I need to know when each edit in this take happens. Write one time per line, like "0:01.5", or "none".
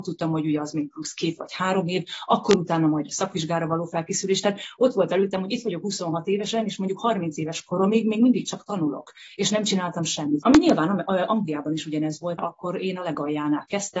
0:10.4
0:12.4